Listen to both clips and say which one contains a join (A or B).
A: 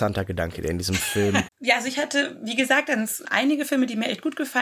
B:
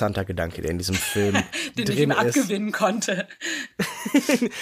A